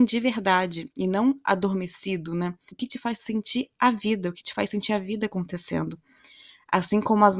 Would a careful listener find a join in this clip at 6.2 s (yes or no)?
no